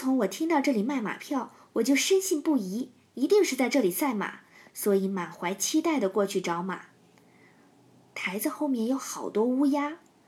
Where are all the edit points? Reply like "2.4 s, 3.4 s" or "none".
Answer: none